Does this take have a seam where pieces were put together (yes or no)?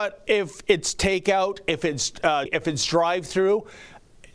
yes